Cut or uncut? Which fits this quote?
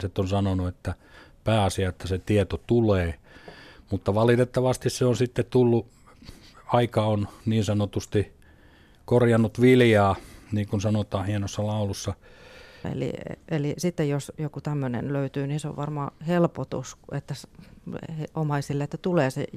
cut